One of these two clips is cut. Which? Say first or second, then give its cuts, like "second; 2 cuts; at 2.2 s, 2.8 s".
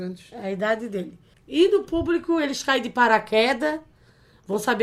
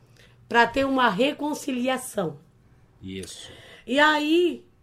first; 1 cut; at 1.3 s